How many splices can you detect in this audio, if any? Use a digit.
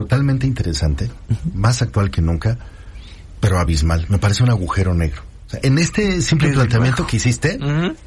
1